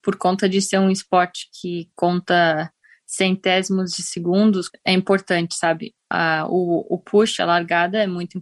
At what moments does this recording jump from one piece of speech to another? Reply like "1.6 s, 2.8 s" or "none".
4.7 s